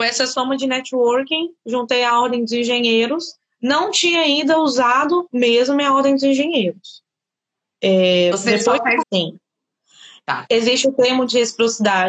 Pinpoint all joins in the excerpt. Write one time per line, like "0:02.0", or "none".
0:09.0